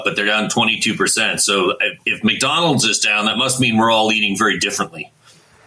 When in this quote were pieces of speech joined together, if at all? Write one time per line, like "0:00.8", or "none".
none